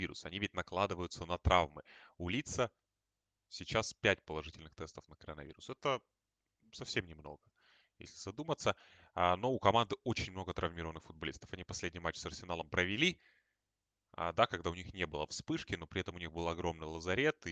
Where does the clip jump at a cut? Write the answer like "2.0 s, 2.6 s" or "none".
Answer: none